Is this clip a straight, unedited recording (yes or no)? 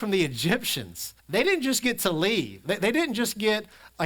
no